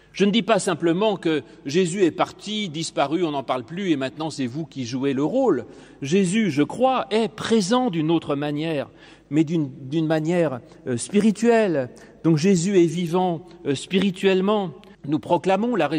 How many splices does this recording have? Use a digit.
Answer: 1